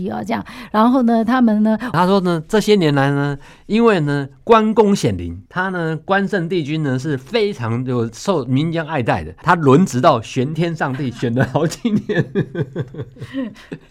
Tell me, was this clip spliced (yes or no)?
yes